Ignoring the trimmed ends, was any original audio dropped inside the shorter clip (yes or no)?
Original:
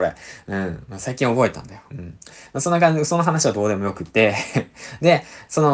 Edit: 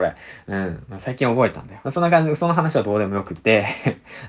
yes